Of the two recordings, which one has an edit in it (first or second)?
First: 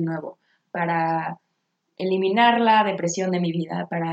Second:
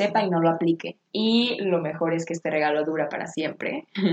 second